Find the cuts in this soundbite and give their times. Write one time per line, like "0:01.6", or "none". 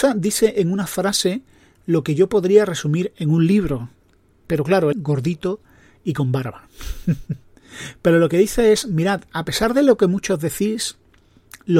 0:04.9